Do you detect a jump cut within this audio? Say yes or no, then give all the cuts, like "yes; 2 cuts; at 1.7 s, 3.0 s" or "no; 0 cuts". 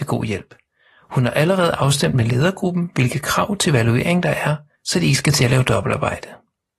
yes; 1 cut; at 4.7 s